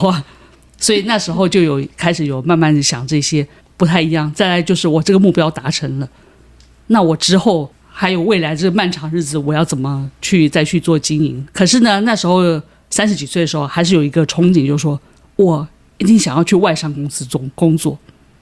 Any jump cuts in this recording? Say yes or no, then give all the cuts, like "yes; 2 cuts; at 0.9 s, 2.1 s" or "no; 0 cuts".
yes; 2 cuts; at 3.6 s, 11.5 s